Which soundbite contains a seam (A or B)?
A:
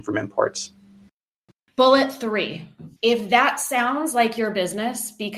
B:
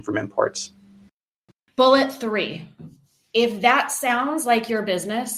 A